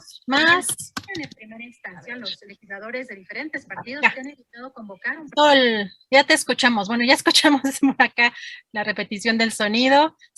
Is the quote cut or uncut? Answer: uncut